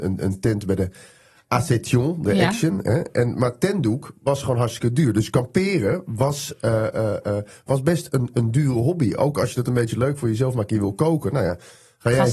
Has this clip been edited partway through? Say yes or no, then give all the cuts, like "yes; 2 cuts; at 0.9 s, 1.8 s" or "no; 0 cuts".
no; 0 cuts